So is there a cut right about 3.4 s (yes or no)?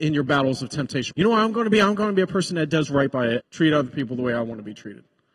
yes